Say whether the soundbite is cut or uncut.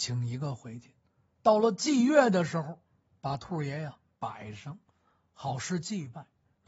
uncut